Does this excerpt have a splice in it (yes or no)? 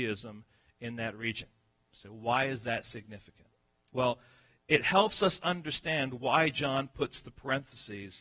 no